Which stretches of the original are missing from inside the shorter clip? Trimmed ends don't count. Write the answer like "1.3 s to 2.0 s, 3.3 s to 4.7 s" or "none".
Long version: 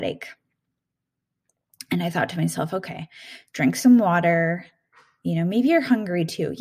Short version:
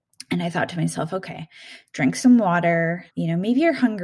4.7 s to 5.2 s

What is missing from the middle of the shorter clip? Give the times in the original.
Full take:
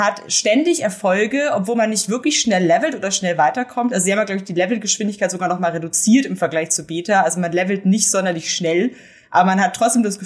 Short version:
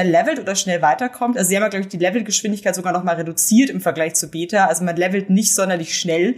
none

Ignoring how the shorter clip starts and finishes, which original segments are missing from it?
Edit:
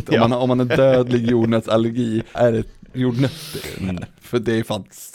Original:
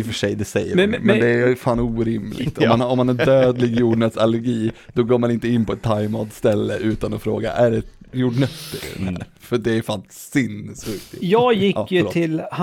4.8 s to 7.5 s

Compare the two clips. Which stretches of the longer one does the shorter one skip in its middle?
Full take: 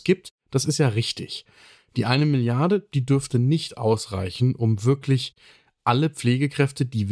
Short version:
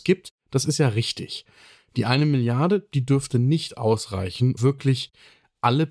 4.6 s to 4.8 s

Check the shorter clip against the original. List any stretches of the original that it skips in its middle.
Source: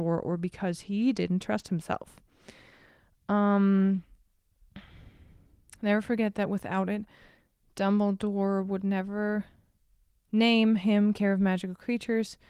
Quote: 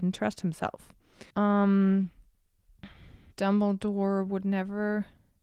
2.6 s to 3.2 s, 5.2 s to 7.7 s

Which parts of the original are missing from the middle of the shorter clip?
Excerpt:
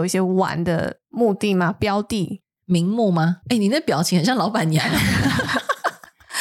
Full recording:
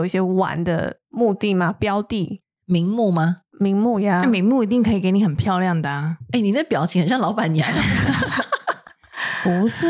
3.4 s to 6.3 s

